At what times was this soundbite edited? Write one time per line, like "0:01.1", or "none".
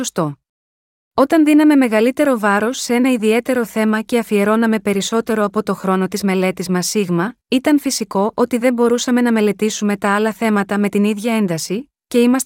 0:01.0
0:07.4